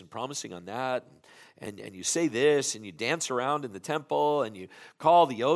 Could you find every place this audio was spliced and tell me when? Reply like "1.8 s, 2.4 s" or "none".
none